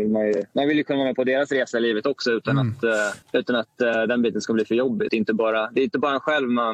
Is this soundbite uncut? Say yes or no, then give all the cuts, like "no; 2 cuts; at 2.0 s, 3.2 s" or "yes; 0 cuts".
no; 2 cuts; at 3.2 s, 5.1 s